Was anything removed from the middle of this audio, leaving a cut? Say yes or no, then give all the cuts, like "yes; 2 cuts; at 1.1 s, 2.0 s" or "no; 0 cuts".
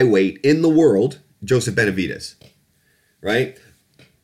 no; 0 cuts